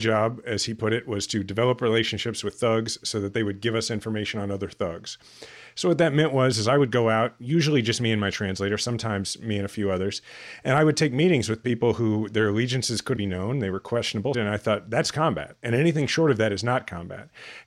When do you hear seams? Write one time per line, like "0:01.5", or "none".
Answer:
0:13.2
0:14.3